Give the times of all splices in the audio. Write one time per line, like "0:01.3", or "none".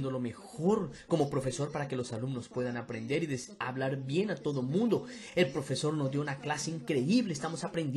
none